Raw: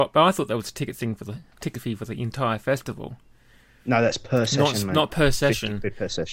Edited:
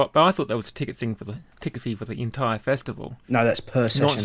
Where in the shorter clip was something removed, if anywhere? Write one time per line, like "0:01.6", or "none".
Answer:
0:03.2